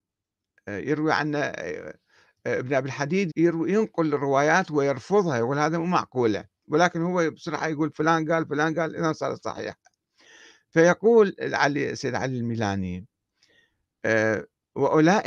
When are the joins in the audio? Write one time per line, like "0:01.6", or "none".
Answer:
0:03.3